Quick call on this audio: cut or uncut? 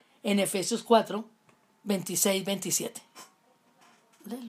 uncut